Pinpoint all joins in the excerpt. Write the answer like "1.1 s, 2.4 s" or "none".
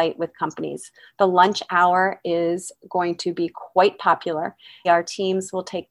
4.8 s

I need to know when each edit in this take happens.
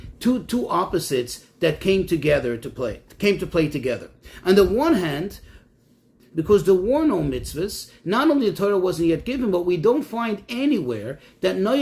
6.2 s

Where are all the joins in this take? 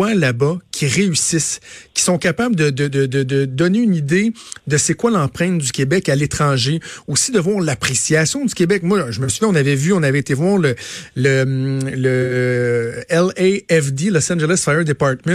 none

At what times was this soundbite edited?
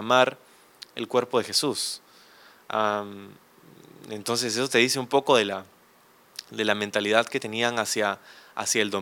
none

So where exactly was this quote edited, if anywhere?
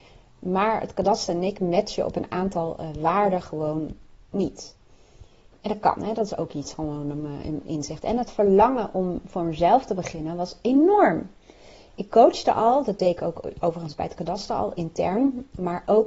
none

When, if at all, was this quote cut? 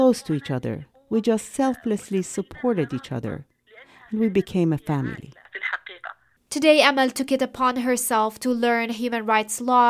none

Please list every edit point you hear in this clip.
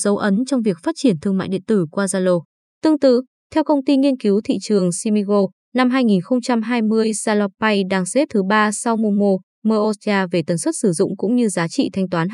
none

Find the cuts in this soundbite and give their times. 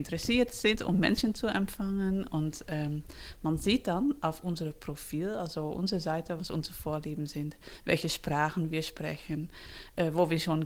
6.4 s

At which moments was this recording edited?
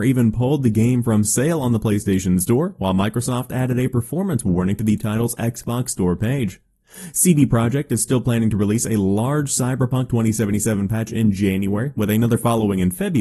none

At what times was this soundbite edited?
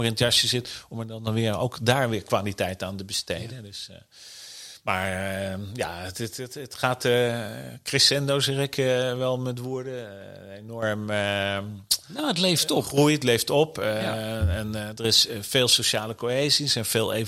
none

